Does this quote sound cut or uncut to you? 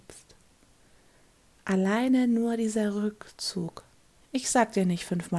cut